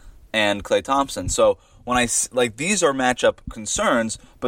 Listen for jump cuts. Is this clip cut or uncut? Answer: uncut